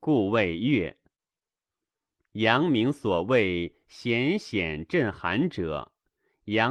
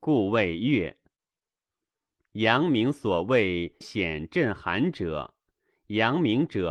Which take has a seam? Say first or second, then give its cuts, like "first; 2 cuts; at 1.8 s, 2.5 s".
second; 1 cut; at 3.8 s